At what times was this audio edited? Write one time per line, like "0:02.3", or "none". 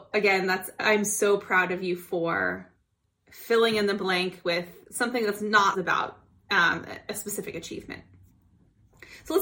0:05.7